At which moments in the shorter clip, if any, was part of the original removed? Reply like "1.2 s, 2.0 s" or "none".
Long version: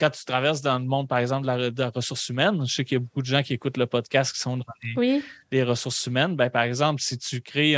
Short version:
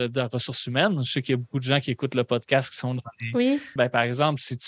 3.8 s